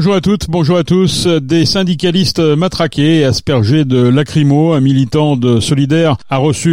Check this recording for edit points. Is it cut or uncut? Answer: uncut